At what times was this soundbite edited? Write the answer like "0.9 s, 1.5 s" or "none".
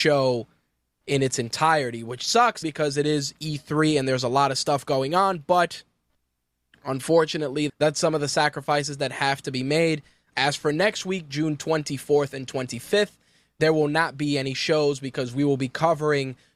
2.6 s, 7.7 s, 10.3 s